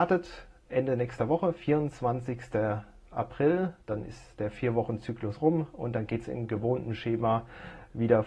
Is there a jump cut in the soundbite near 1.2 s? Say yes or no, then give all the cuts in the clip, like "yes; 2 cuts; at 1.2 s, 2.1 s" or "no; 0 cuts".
no; 1 cut; at 3.8 s